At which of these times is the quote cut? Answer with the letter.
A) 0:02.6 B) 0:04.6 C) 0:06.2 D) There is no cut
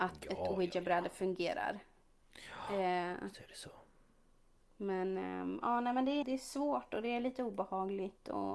C